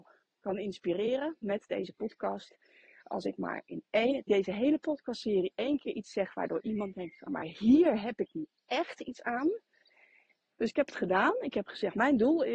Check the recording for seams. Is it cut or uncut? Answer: cut